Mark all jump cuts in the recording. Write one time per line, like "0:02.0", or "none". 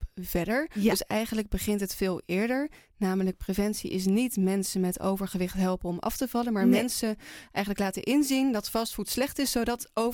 none